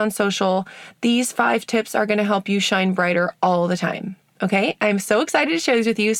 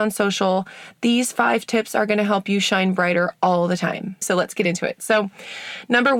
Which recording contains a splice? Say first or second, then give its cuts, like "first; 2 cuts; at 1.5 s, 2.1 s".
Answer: second; 1 cut; at 4.2 s